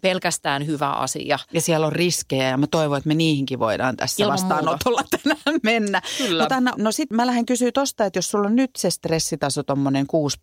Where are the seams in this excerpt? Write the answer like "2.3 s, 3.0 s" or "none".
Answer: 6.7 s